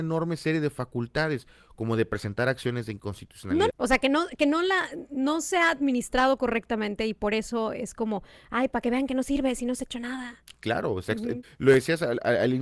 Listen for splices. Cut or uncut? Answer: cut